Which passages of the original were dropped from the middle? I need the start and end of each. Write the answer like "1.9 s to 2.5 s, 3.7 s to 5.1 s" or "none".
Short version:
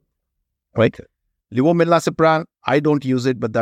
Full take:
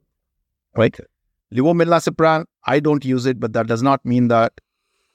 none